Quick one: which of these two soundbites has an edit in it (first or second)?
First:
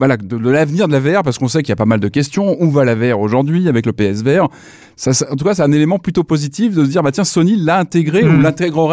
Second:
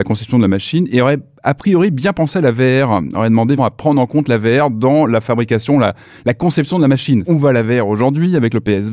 second